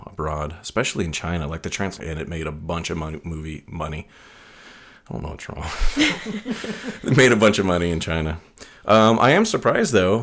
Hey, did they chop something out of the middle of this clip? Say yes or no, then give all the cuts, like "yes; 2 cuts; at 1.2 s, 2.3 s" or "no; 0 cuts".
yes; 1 cut; at 2.0 s